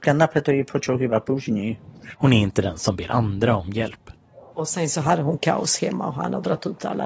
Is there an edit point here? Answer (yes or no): yes